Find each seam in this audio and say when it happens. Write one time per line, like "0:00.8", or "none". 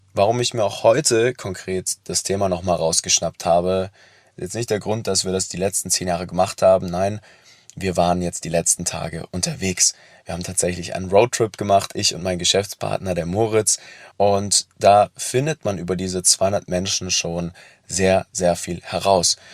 0:14.1